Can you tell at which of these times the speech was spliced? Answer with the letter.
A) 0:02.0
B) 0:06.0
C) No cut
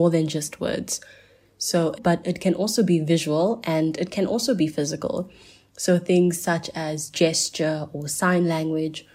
A